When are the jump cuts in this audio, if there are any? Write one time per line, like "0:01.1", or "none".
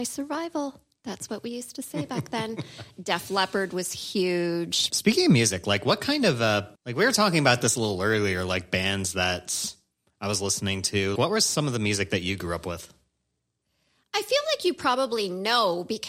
0:04.9
0:06.8
0:11.2